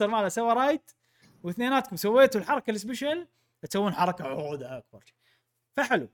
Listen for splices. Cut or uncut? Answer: uncut